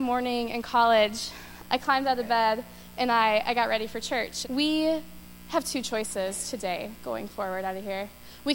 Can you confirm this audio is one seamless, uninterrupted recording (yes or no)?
no